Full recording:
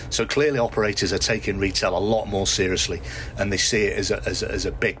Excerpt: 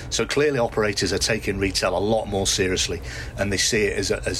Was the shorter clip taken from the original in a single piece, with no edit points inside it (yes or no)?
yes